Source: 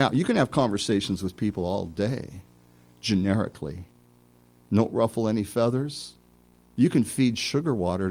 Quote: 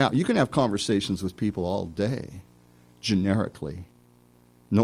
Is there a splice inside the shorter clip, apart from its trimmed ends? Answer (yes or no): no